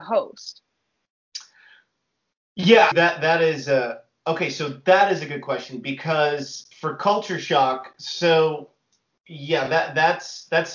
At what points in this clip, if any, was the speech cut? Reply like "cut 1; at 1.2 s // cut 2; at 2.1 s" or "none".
cut 1; at 2.9 s // cut 2; at 6.7 s